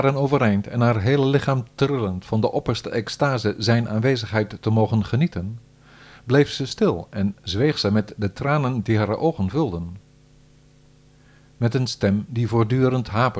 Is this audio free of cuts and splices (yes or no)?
yes